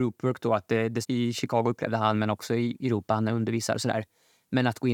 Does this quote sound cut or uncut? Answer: cut